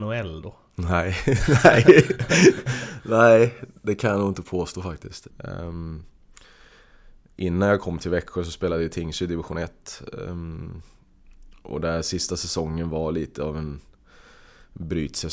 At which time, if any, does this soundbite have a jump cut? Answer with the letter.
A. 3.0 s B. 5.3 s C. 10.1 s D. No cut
B